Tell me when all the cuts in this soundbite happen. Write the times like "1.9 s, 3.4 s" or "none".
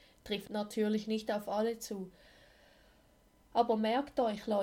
none